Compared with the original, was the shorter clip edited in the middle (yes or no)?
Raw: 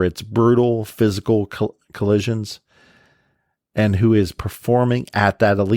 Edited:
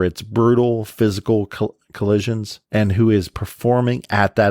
yes